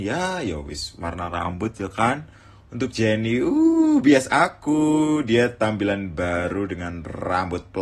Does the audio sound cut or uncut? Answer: uncut